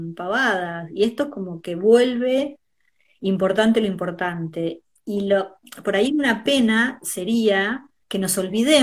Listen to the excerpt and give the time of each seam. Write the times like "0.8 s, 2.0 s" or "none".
none